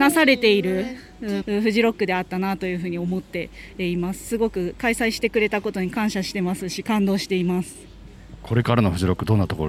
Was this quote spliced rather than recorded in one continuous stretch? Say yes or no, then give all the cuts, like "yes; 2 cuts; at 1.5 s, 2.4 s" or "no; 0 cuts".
yes; 1 cut; at 1.4 s